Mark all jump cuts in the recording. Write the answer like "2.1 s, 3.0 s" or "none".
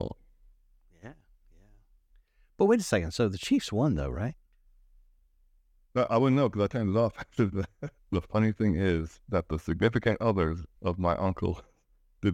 8.0 s, 9.2 s, 10.8 s

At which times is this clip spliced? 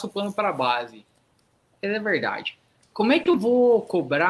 2.8 s

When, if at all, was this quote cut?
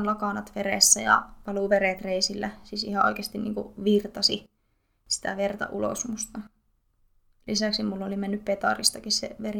none

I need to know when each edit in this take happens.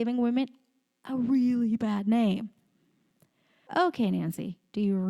3.7 s

